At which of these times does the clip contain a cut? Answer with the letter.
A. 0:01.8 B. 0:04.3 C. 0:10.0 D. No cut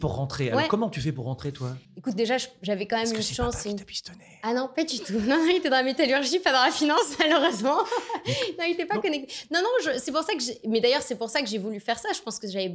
A